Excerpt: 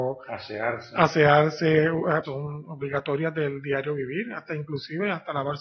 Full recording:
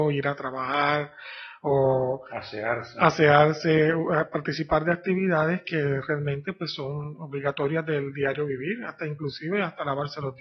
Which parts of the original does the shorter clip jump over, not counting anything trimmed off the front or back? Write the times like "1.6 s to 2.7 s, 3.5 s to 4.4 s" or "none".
4.3 s to 6.8 s

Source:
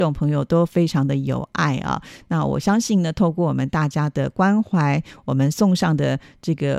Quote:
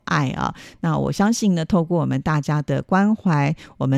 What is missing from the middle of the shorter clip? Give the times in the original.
none

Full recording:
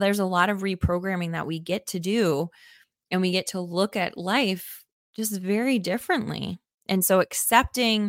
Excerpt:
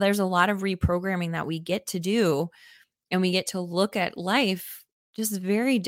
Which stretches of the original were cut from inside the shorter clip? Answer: none

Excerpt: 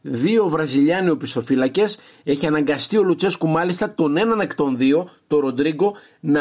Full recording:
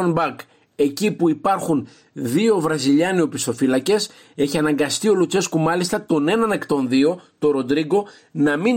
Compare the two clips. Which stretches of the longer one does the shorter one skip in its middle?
none

